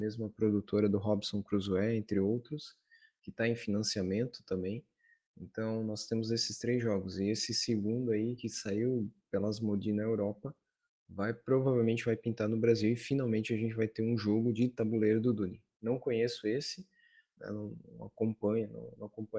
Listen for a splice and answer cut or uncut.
uncut